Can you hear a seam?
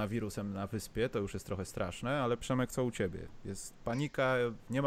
no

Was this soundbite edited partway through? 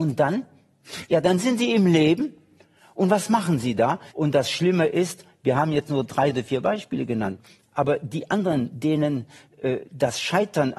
yes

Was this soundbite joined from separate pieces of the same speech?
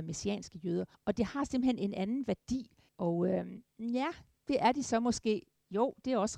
yes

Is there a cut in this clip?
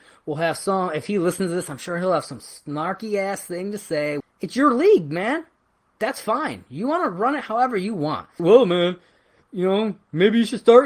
yes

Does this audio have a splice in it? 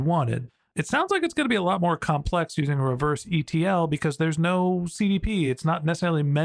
no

